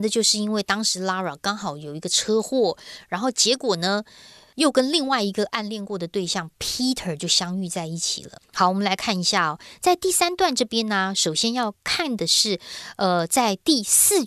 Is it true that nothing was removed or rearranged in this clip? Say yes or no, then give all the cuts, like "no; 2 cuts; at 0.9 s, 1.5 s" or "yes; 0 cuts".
yes; 0 cuts